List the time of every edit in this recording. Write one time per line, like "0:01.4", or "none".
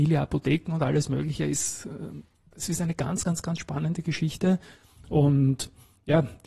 none